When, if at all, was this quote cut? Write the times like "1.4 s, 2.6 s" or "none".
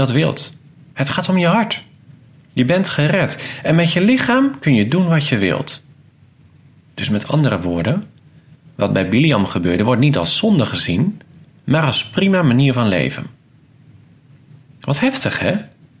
none

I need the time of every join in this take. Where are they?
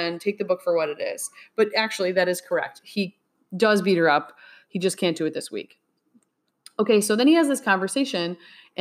none

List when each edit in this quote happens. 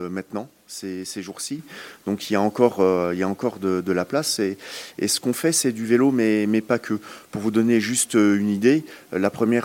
none

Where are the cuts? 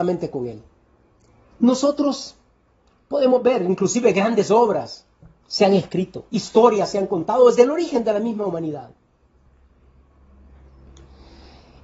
1.4 s, 6.3 s

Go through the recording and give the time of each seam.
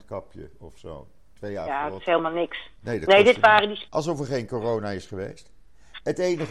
3.9 s

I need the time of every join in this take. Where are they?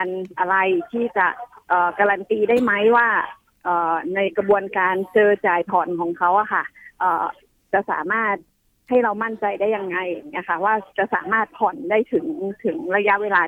none

